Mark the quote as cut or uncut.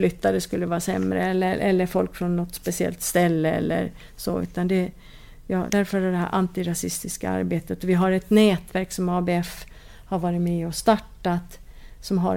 cut